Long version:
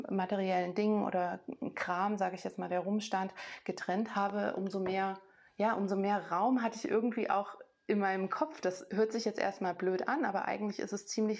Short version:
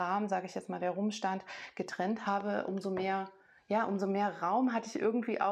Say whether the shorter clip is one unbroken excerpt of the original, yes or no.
yes